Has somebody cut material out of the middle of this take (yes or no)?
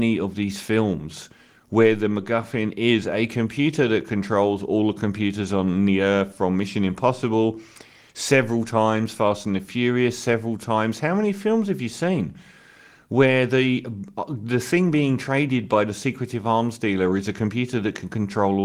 no